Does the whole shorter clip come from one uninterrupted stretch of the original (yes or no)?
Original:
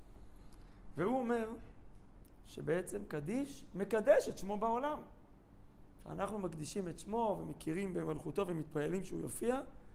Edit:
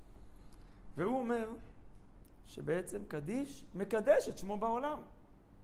yes